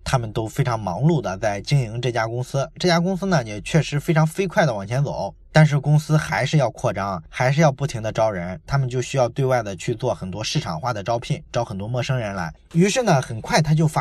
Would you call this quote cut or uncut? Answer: cut